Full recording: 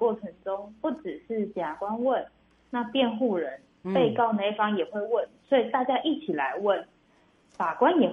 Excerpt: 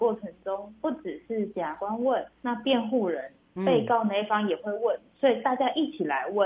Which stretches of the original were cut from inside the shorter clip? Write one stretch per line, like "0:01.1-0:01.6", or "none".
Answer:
0:02.3-0:02.6